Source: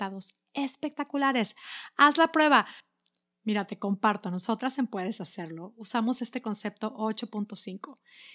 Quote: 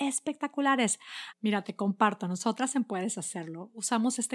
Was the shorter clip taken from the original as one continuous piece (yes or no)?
no